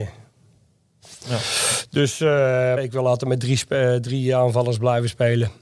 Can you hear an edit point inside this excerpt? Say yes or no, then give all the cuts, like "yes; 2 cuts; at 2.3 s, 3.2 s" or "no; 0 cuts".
yes; 2 cuts; at 1.2 s, 2.8 s